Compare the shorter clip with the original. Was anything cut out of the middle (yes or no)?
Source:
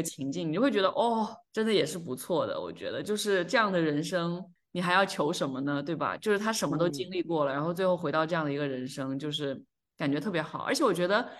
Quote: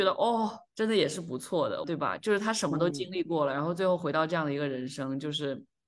yes